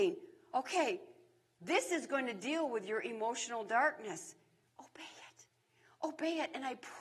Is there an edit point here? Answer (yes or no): no